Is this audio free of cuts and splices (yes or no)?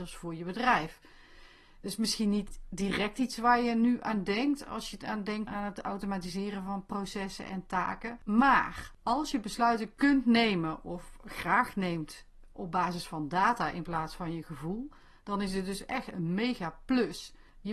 no